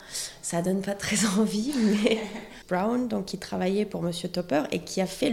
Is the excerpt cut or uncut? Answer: cut